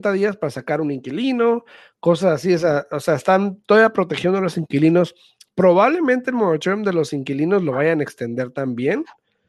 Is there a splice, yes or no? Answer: no